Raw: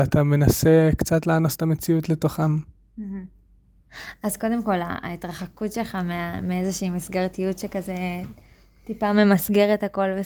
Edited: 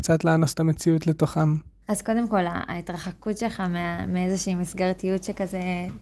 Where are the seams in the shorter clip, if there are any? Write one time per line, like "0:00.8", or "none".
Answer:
0:01.8